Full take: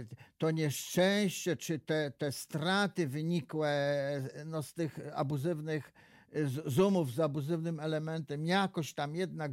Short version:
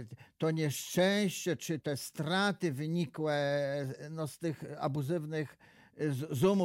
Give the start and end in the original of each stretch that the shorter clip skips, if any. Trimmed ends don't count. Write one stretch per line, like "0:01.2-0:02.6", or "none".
0:01.8-0:02.2